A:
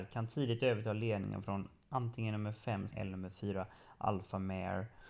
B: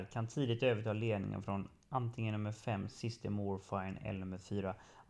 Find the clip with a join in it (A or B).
A